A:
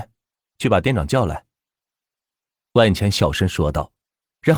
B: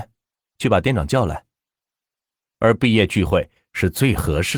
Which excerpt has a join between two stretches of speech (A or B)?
B